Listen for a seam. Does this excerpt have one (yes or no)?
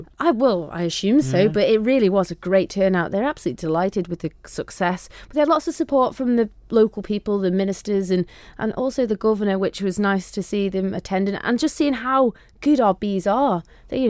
no